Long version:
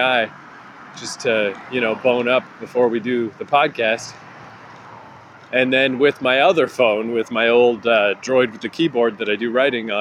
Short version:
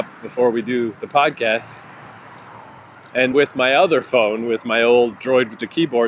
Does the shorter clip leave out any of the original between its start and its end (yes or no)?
yes